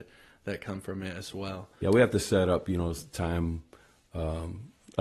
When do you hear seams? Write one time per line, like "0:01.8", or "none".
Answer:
0:01.8